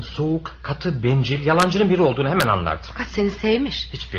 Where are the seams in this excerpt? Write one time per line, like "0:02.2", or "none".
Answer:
none